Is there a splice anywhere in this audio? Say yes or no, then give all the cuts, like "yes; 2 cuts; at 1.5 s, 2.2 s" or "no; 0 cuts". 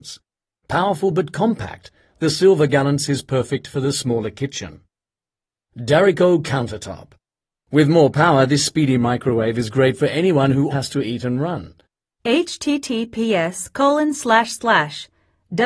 yes; 2 cuts; at 10.7 s, 12.1 s